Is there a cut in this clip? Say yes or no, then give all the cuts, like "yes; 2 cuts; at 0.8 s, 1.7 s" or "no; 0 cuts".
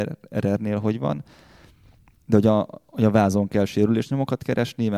no; 0 cuts